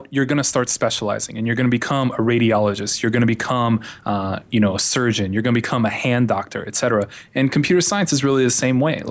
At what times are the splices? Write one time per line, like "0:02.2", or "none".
none